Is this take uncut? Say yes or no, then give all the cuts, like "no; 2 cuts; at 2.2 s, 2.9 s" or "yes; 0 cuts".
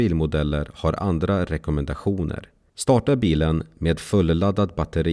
no; 1 cut; at 2.7 s